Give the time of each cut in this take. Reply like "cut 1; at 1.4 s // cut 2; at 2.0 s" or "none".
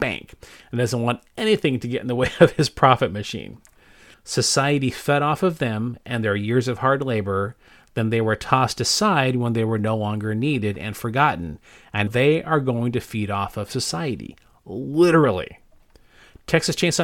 cut 1; at 4.1 s // cut 2; at 12.1 s